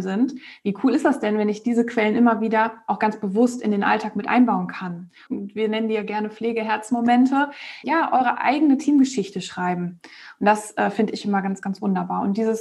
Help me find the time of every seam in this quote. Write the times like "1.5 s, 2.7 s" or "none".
5.3 s, 7.8 s